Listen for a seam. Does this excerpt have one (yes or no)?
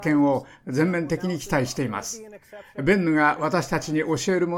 no